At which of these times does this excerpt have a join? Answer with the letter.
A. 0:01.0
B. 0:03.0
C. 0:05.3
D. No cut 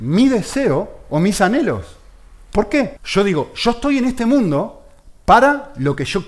B